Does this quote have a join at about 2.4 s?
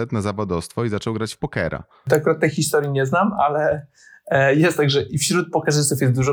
no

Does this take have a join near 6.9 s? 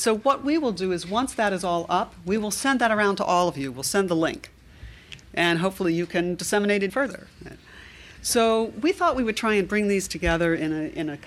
yes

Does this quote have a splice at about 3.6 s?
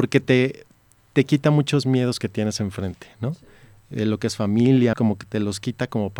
no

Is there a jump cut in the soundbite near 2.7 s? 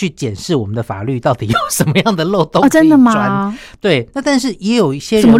no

